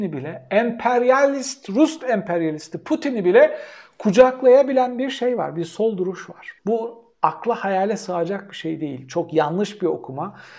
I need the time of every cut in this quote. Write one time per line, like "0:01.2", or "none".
0:06.6